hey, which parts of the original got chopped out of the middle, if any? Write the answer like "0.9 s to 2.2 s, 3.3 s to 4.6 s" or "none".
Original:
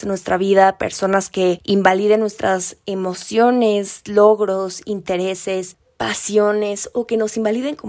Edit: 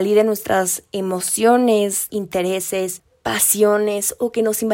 4.0 s to 4.8 s